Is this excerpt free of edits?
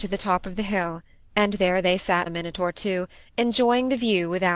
no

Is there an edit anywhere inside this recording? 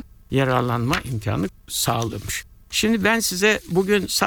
no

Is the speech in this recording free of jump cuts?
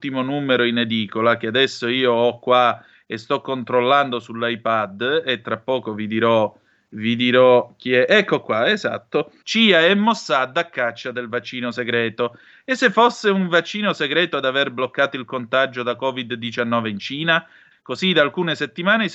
no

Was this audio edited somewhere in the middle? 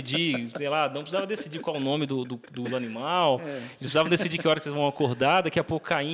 no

